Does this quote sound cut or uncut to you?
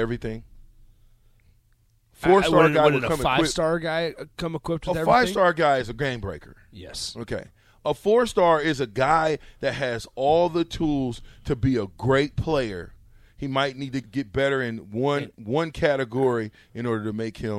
cut